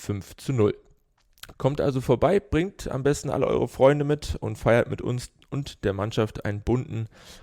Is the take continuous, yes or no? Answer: no